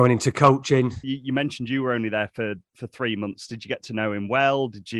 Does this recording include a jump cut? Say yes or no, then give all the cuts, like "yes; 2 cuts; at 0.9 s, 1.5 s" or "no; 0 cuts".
yes; 1 cut; at 1.0 s